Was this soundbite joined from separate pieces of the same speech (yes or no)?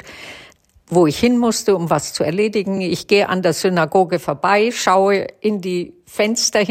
no